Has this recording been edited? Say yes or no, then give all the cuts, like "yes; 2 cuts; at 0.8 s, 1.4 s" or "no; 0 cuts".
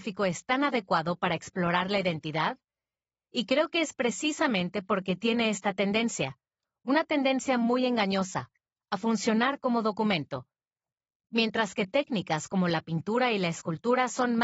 no; 0 cuts